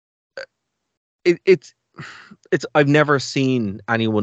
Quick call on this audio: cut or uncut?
uncut